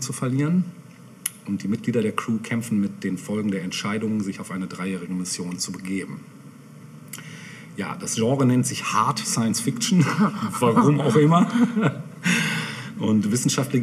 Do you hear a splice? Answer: no; 0 cuts

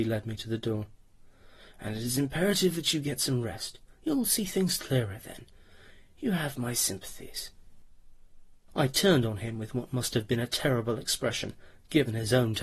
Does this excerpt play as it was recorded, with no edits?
yes; 0 cuts

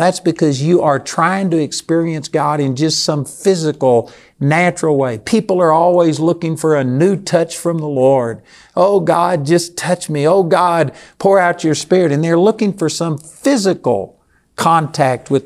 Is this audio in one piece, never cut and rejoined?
yes; 0 cuts

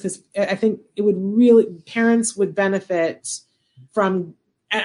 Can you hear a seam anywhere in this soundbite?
yes; 1 cut; at 3.9 s

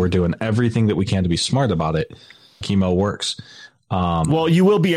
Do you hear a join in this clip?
yes; 1 cut; at 2.6 s

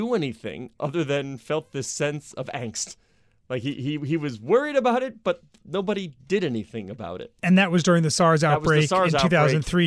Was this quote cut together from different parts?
no; 0 cuts

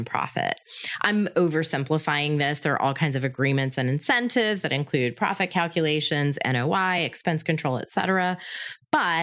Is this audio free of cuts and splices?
yes; 0 cuts

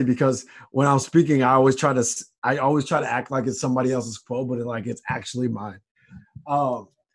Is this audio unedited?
yes; 0 cuts

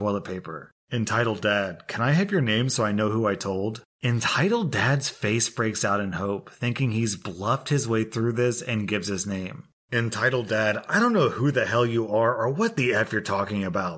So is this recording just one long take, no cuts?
yes; 0 cuts

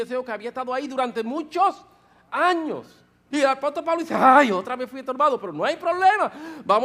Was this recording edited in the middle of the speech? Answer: yes; 1 cut; at 3.3 s

